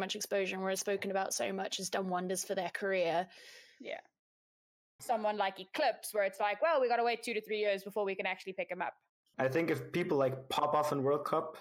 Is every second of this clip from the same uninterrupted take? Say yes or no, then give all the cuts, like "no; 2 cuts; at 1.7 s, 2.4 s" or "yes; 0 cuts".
no; 2 cuts; at 5.0 s, 9.3 s